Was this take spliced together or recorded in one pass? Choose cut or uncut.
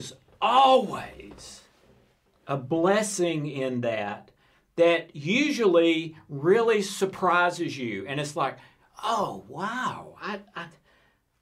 uncut